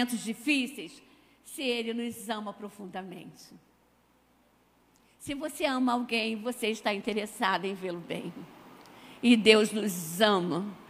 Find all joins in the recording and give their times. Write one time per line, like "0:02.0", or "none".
none